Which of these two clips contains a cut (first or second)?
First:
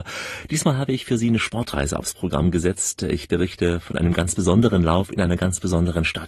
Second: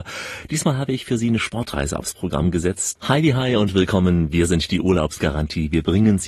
second